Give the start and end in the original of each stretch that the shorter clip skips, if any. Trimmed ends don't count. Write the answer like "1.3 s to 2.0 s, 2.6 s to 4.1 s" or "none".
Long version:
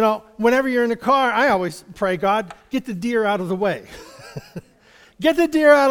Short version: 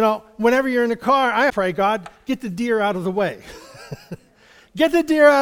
1.5 s to 1.9 s